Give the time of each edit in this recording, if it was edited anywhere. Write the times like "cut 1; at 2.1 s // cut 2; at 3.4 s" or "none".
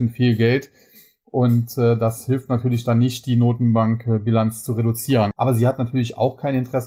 cut 1; at 5.3 s